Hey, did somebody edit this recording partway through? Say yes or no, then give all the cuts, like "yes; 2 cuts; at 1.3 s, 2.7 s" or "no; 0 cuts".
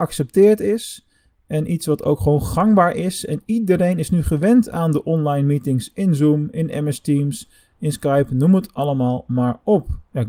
no; 0 cuts